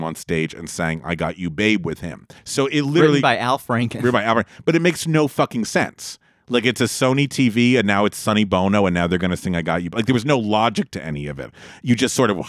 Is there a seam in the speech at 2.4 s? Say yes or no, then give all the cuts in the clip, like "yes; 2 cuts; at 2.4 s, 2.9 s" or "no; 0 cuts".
yes; 1 cut; at 2.4 s